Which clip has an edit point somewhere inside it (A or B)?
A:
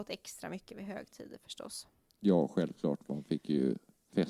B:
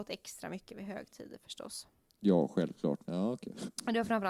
B